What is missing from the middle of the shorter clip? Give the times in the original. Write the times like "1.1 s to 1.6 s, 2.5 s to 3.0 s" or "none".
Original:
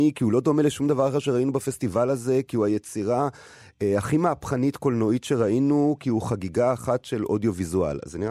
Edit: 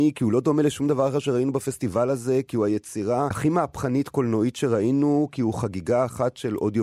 3.3 s to 4.0 s